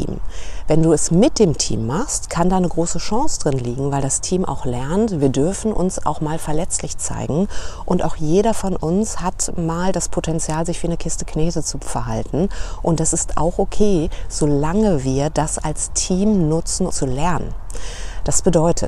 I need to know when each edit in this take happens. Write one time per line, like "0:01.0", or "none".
0:16.9